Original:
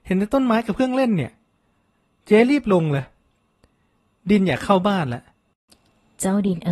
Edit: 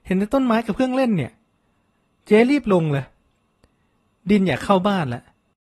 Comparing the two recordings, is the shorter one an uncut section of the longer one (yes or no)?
yes